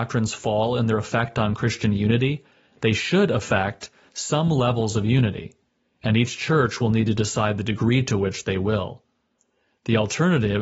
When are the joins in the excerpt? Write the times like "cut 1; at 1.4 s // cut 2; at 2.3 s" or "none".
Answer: none